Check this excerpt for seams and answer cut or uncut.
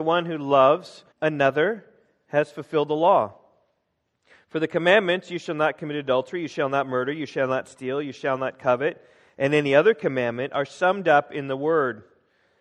cut